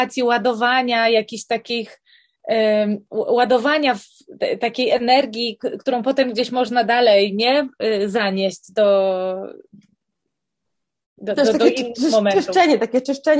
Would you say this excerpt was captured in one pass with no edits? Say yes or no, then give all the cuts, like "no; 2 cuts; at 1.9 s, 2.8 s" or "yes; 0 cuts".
no; 1 cut; at 4.4 s